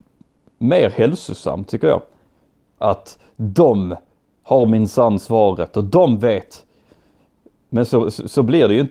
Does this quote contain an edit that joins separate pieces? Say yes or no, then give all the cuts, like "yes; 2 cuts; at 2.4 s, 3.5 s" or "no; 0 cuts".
yes; 2 cuts; at 2.7 s, 7.7 s